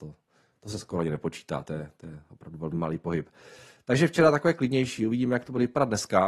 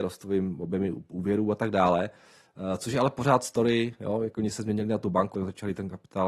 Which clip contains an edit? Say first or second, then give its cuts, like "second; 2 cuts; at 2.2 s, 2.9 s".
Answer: second; 1 cut; at 5.3 s